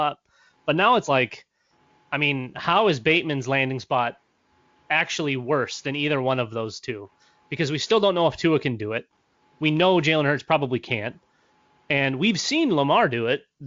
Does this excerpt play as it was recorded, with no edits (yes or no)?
yes